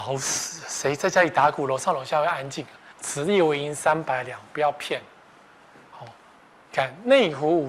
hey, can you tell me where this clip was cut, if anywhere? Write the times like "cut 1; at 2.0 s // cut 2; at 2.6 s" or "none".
cut 1; at 2.9 s

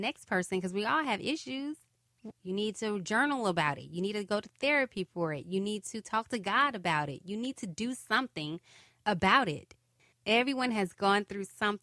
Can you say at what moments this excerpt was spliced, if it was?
cut 1; at 2.3 s

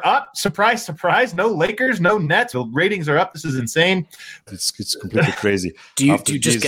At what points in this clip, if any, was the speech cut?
cut 1; at 2.5 s // cut 2; at 4.5 s

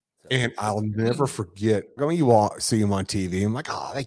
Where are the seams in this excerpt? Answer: cut 1; at 2.0 s

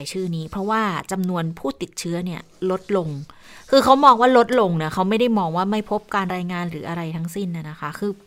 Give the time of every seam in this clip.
cut 1; at 6.3 s

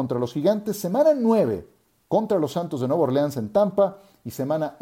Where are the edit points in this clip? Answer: none

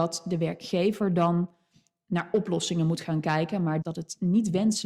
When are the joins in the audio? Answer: cut 1; at 3.8 s

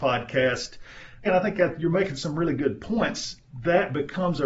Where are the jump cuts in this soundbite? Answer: cut 1; at 1.2 s

